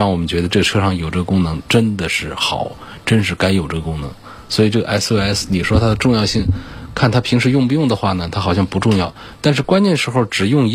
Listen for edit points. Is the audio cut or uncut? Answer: uncut